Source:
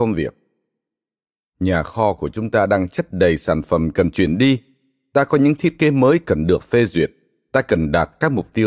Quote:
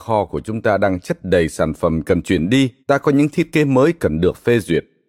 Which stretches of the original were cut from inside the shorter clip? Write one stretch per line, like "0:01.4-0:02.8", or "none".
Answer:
0:04.7-0:05.1